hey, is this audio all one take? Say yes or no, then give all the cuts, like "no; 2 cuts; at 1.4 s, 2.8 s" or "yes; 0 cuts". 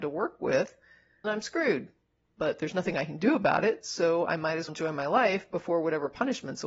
no; 2 cuts; at 1.2 s, 4.7 s